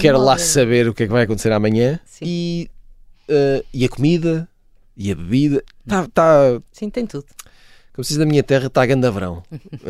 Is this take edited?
no; 0 cuts

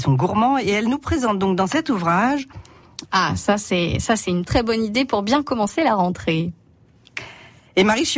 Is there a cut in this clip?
yes; 2 cuts; at 3.0 s, 4.5 s

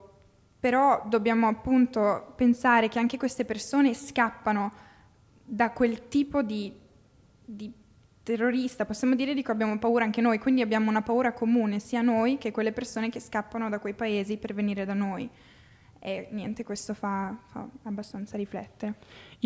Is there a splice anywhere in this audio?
no; 0 cuts

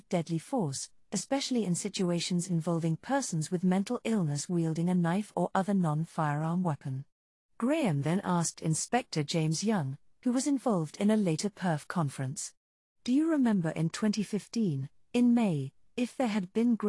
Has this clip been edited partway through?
no; 0 cuts

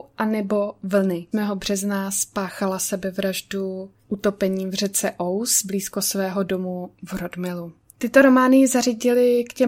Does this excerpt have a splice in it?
yes; 2 cuts; at 1.3 s, 7.9 s

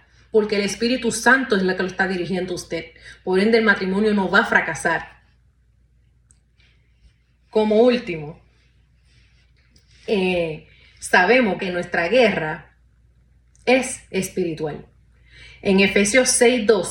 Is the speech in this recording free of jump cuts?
no; 1 cut; at 11.6 s

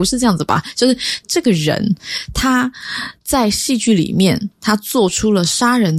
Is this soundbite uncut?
no; 1 cut; at 1.2 s

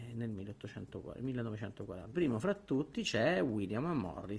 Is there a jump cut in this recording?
yes; 1 cut; at 2.1 s

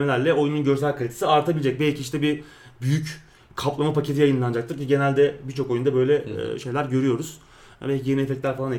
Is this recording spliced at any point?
no; 0 cuts

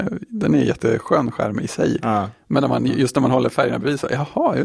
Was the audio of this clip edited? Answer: no; 0 cuts

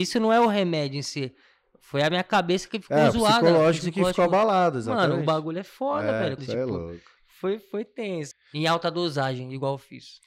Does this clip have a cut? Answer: yes; 2 cuts; at 6.4 s, 8.3 s

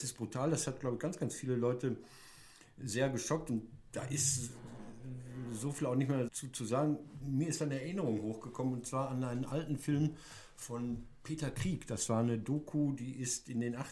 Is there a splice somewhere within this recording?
yes; 1 cut; at 6.3 s

